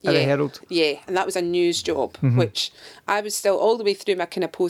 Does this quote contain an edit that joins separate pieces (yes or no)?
no